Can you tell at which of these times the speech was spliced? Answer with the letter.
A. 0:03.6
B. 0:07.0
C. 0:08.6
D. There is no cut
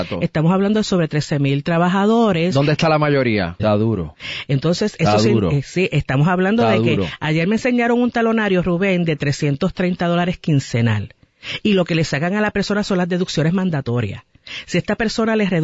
A